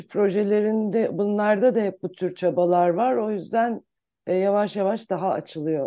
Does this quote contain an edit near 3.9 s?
no; 0 cuts

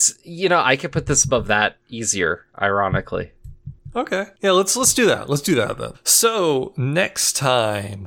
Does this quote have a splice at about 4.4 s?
no; 1 cut; at 5.9 s

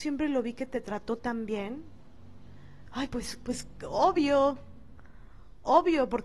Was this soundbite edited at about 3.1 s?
no; 0 cuts

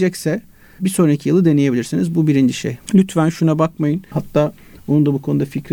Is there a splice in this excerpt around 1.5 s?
no; 2 cuts; at 2.9 s, 4.1 s

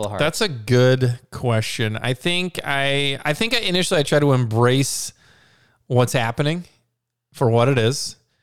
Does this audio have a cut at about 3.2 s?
no; 0 cuts

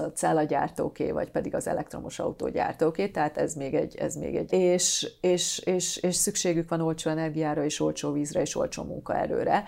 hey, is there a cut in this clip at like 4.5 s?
yes; 1 cut; at 4.5 s

